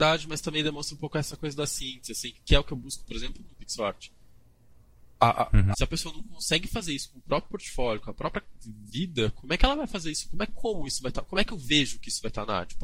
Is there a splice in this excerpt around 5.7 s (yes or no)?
yes